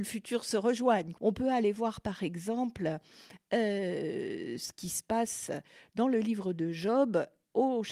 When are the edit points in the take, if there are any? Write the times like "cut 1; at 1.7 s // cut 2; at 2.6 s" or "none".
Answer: cut 1; at 1.2 s